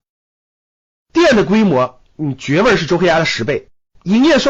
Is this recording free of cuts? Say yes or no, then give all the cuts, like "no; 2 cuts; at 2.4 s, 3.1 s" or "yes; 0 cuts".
yes; 0 cuts